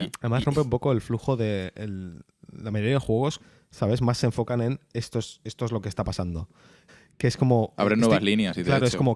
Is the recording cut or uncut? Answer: cut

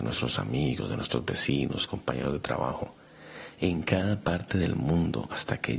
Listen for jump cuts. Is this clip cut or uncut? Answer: uncut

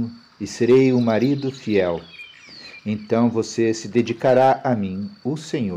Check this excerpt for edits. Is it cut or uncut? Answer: uncut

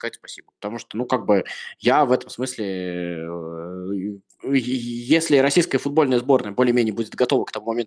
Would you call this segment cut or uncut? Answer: uncut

